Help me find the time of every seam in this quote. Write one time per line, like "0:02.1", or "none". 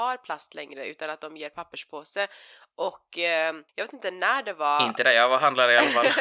0:03.7